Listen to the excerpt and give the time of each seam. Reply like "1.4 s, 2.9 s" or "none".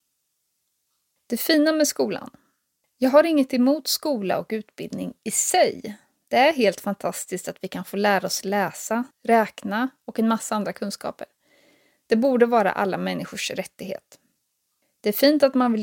9.1 s

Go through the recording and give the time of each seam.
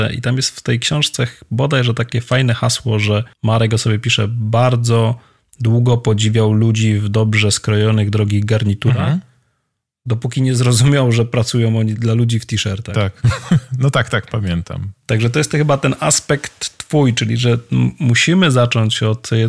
3.3 s

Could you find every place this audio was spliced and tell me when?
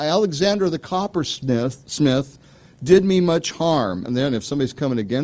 4.0 s

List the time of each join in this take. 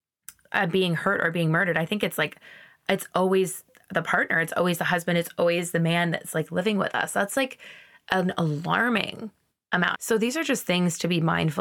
9.9 s

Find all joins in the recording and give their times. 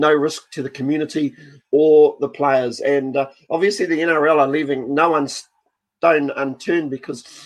none

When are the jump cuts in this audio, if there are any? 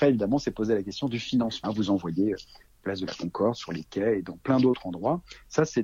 1.6 s

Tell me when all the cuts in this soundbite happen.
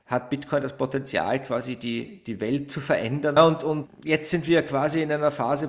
3.4 s

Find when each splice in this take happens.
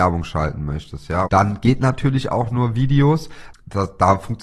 1.3 s, 3.5 s

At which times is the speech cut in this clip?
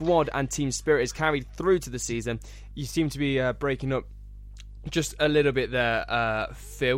2.7 s

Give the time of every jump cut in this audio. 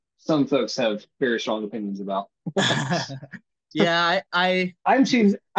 none

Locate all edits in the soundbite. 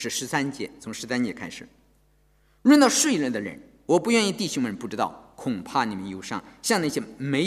none

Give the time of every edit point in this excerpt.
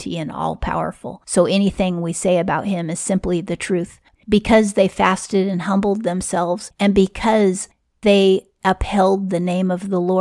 4.1 s

